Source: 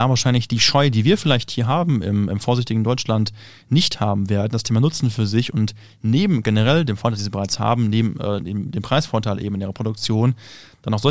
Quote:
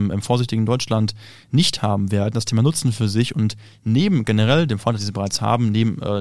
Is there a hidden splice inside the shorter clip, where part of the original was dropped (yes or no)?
no